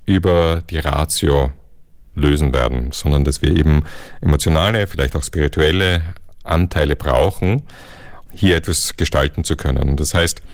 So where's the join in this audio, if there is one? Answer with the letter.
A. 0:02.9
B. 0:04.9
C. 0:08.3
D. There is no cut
C